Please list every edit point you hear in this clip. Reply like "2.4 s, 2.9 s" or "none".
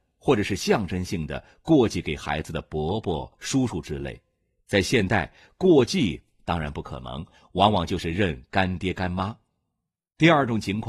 none